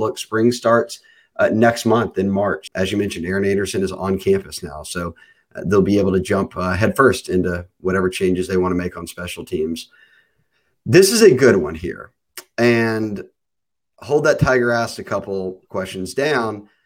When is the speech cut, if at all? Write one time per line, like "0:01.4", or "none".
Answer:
0:02.7